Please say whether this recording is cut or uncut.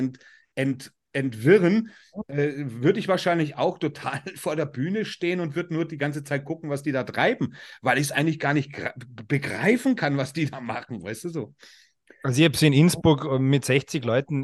uncut